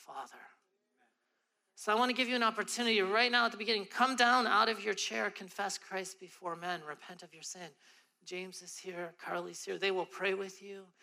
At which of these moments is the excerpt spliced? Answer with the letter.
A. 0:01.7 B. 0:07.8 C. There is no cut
C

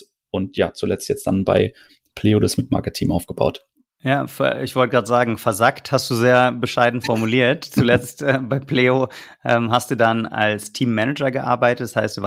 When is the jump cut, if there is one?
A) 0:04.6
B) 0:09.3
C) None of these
C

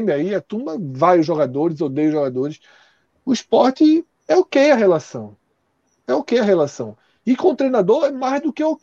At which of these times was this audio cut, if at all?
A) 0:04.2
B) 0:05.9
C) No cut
A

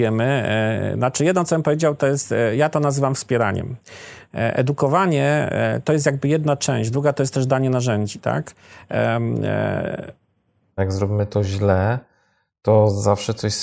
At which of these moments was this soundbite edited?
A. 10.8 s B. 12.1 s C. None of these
A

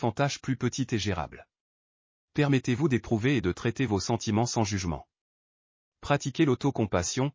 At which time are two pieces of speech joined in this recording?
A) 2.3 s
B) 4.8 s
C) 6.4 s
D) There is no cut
A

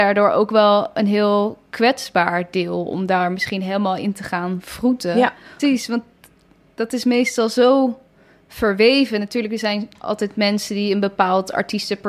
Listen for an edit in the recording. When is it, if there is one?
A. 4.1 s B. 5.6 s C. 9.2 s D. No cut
B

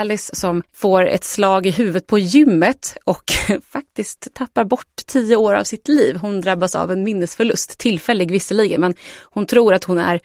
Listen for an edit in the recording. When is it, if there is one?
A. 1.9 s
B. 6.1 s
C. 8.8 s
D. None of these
D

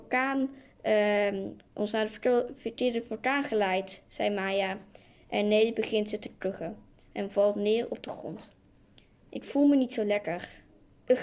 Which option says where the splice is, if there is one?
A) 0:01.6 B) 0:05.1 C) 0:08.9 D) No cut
D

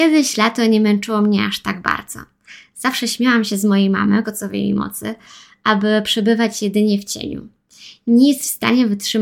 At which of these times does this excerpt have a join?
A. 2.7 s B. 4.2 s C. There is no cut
B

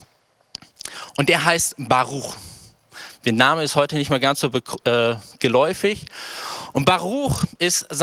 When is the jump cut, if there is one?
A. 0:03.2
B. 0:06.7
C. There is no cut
C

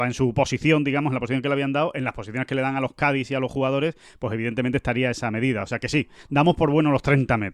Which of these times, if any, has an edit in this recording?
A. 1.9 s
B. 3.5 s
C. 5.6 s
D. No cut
D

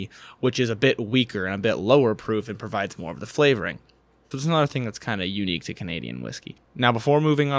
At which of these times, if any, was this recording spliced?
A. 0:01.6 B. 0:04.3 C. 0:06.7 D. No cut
B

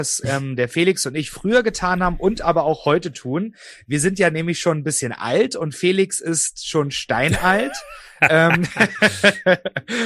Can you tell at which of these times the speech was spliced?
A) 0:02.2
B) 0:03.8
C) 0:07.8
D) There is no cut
D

